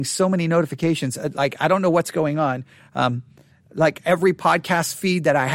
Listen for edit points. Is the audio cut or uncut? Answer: uncut